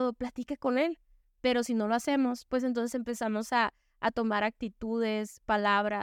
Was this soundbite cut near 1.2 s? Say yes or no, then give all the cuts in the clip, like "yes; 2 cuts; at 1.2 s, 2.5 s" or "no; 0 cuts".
yes; 1 cut; at 1.2 s